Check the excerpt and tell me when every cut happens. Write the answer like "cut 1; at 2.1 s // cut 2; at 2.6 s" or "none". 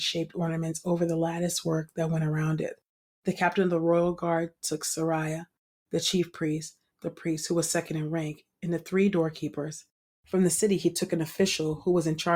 cut 1; at 6.9 s